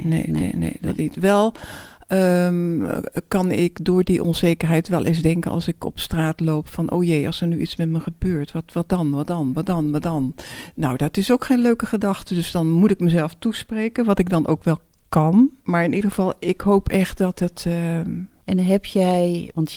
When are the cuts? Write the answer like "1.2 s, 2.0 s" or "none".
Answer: 18.4 s